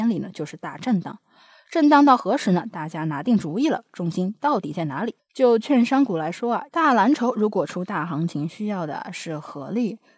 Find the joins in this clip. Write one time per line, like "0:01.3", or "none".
0:05.2
0:06.7